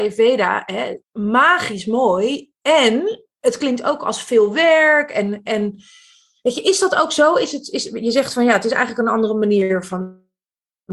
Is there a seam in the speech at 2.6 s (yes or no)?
no